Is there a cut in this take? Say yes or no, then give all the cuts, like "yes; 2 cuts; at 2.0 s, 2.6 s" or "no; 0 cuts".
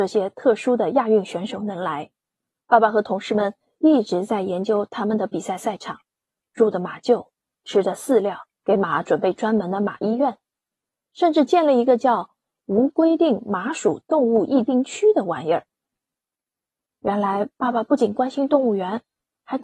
yes; 1 cut; at 8.5 s